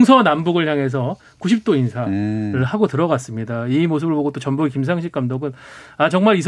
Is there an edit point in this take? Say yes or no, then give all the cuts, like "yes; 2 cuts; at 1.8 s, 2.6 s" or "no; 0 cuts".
no; 0 cuts